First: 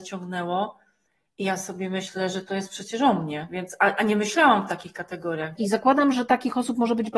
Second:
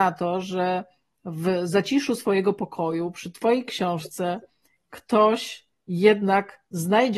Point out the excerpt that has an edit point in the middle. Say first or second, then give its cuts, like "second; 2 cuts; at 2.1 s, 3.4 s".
first; 1 cut; at 5.6 s